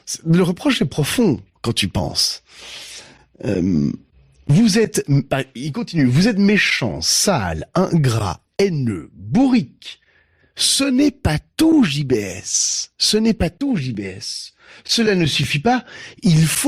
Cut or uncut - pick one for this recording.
uncut